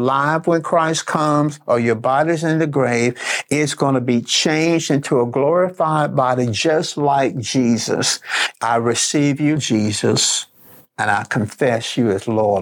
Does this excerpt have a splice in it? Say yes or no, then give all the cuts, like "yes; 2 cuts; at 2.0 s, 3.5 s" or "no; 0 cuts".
yes; 2 cuts; at 8.5 s, 9.6 s